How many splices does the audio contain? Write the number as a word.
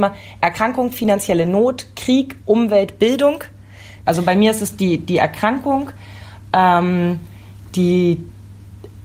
one